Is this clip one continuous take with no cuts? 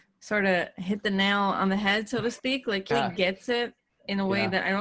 no; 1 cut; at 2.9 s

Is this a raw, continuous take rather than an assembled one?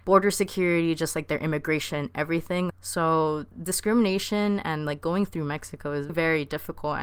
no; 2 cuts; at 2.7 s, 6.1 s

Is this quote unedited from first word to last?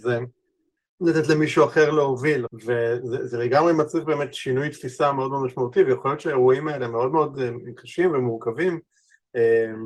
no; 2 cuts; at 0.9 s, 2.5 s

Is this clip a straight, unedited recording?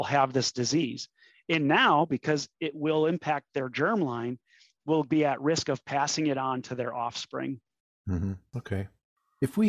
yes; 0 cuts

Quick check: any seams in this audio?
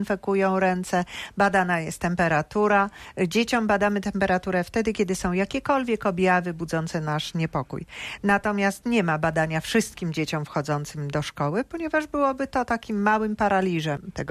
no; 0 cuts

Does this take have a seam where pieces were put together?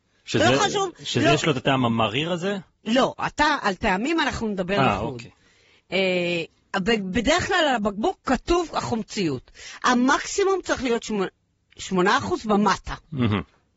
no; 0 cuts

